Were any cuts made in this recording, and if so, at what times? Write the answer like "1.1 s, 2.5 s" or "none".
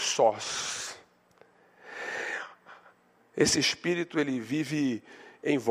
3.2 s